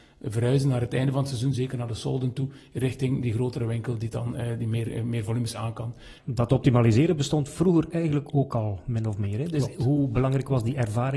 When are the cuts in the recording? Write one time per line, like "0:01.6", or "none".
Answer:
0:06.2